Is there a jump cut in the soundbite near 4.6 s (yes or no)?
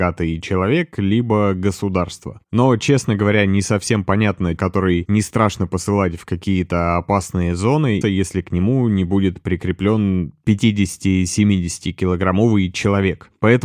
yes